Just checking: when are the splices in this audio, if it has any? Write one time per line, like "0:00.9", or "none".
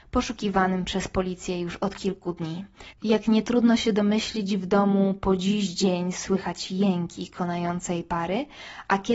0:02.9